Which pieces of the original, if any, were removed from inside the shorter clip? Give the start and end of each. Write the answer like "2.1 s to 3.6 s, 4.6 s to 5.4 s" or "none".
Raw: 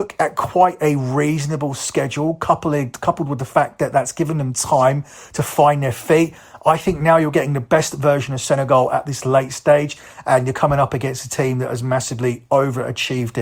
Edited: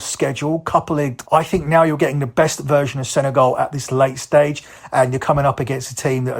3.0 s to 6.6 s